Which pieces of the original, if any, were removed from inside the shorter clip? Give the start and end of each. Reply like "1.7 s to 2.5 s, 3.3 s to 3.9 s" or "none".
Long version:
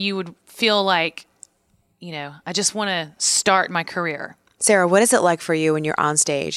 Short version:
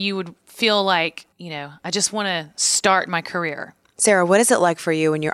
1.3 s to 1.9 s